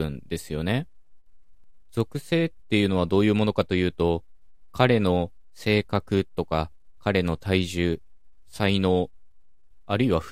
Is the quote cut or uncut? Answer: uncut